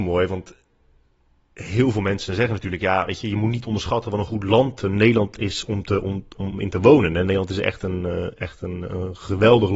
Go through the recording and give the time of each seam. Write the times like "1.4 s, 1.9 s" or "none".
none